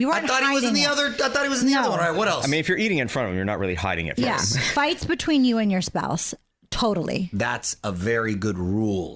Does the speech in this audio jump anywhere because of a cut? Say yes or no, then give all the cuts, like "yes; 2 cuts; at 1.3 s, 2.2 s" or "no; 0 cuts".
no; 0 cuts